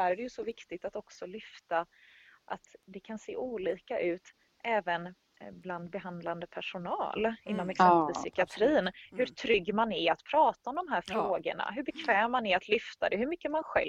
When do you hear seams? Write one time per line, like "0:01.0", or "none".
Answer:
none